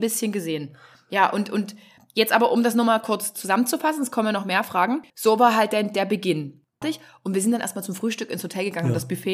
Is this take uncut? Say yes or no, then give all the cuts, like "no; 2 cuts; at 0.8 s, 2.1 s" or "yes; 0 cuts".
no; 2 cuts; at 5.1 s, 6.8 s